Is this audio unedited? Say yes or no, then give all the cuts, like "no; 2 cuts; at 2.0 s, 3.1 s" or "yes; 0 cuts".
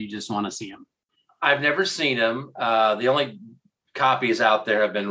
yes; 0 cuts